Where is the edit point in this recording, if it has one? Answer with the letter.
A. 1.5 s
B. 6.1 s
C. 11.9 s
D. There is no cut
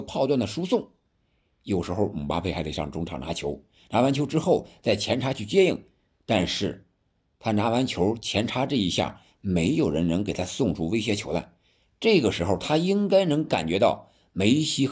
D